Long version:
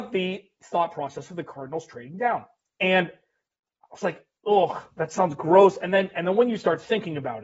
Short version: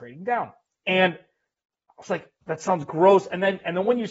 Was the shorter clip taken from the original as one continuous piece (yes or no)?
no